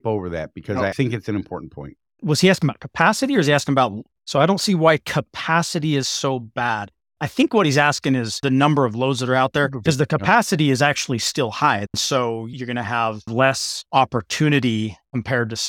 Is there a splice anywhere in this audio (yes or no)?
yes